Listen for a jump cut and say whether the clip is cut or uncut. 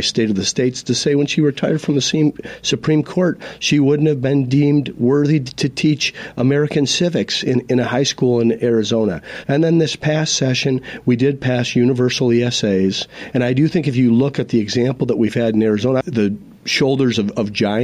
cut